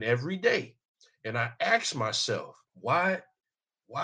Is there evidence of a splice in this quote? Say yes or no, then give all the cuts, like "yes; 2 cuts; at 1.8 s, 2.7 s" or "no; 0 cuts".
yes; 1 cut; at 2.6 s